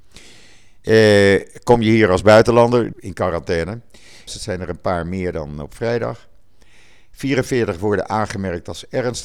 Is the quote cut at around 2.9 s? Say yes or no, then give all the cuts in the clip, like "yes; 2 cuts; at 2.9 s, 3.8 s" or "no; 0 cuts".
yes; 2 cuts; at 2.9 s, 4.3 s